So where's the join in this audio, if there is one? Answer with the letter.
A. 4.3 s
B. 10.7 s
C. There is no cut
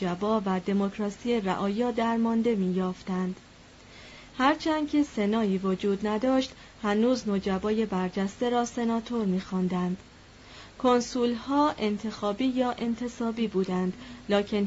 A